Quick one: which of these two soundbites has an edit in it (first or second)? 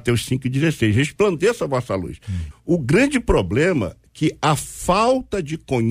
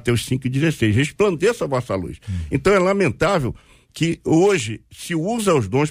first